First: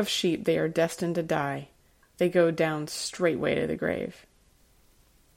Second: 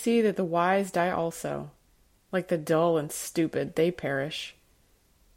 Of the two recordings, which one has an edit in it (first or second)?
first